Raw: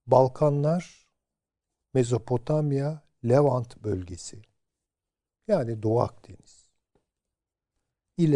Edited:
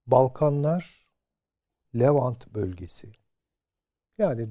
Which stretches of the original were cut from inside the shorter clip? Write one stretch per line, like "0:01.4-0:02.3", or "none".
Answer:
0:01.8-0:03.1